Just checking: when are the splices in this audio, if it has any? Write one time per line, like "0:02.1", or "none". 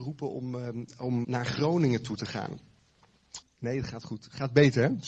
0:01.2
0:03.4